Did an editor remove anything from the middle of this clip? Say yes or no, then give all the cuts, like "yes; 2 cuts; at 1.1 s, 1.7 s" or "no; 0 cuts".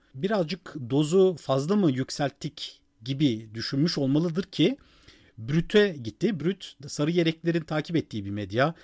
yes; 1 cut; at 6.4 s